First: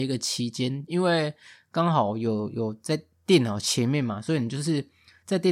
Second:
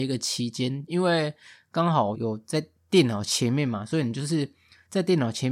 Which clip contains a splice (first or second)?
second